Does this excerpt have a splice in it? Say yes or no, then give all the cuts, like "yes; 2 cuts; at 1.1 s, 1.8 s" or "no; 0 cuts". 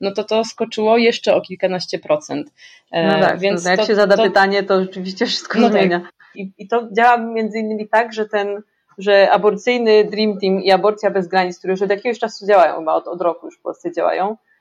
yes; 2 cuts; at 6.3 s, 13.0 s